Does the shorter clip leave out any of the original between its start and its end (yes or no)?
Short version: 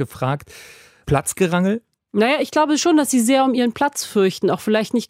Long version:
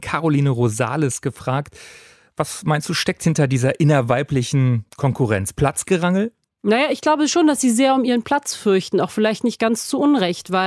yes